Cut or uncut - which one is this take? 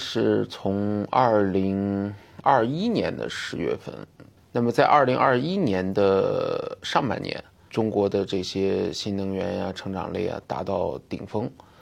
cut